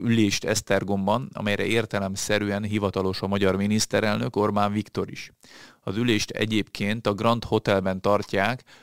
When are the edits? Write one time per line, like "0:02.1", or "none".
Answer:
none